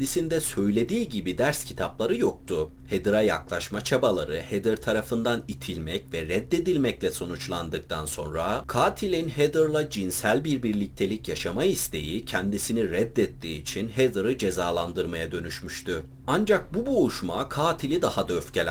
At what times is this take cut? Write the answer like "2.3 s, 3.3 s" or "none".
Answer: 16.2 s